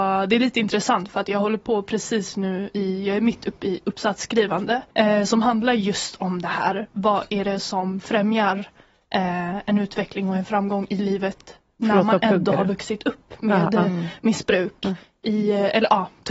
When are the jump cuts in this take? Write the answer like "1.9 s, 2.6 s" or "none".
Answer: 4.9 s